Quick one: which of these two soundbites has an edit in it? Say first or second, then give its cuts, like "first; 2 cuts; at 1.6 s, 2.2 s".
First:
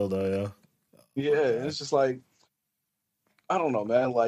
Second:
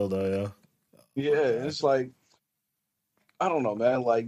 second; 1 cut; at 1.8 s